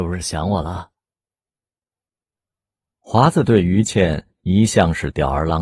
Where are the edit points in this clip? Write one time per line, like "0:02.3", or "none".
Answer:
none